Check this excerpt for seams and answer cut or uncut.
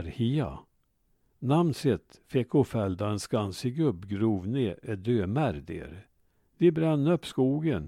cut